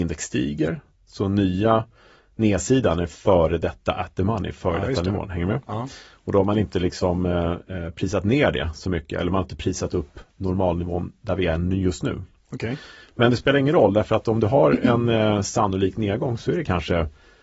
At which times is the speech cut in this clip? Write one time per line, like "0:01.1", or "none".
0:12.5

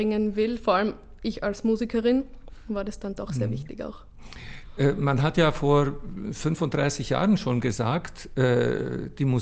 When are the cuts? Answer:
none

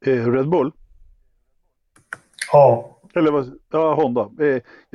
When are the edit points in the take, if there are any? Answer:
none

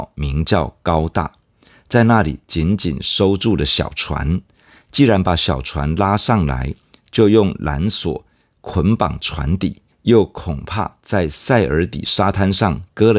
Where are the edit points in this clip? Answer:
0:09.9

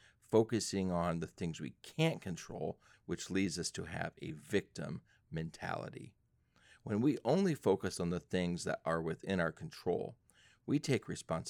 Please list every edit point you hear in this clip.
0:02.9

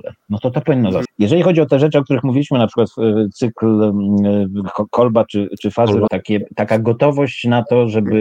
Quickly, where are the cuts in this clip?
0:01.1
0:06.1

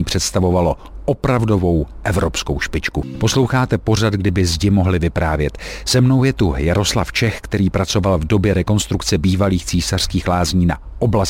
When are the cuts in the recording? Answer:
none

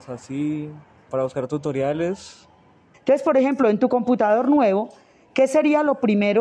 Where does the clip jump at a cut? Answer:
0:01.1
0:02.9

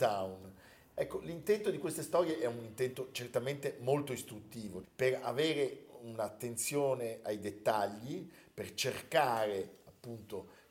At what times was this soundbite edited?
0:00.9
0:04.8

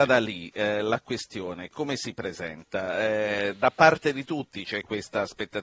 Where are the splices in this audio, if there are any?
0:01.7

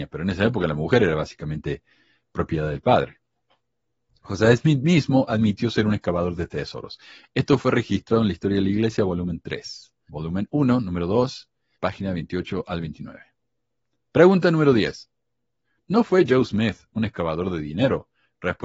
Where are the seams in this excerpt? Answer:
0:10.1
0:11.8

